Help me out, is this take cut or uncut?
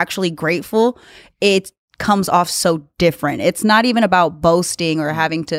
uncut